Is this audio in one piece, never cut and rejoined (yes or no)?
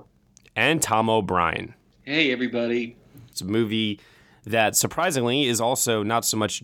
no